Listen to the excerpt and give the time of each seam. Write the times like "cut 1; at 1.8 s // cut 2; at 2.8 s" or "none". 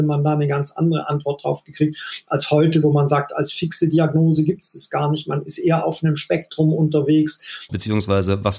cut 1; at 7.7 s

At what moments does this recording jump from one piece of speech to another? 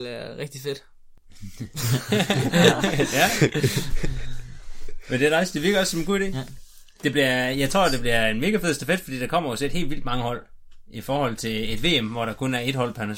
none

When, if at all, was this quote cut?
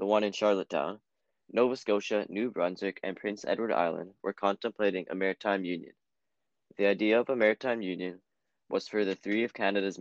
none

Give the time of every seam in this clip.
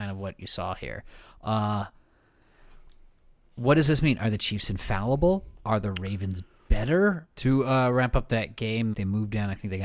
cut 1; at 7.3 s // cut 2; at 8.9 s

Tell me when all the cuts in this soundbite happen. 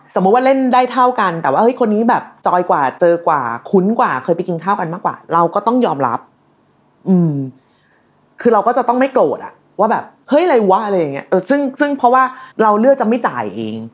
cut 1; at 12.5 s

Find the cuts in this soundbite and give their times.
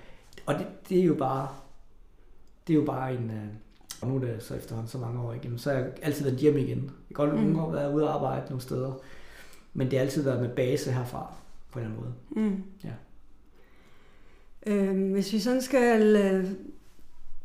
cut 1; at 4.0 s

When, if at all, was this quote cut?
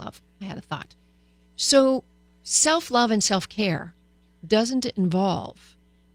none

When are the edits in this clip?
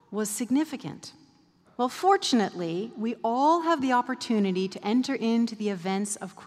cut 1; at 1.6 s

